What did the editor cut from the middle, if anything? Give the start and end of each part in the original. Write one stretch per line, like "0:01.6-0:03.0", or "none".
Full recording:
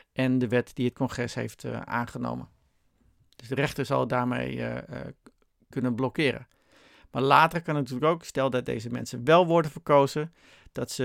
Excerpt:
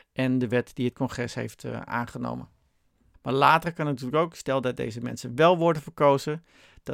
0:03.1-0:07.0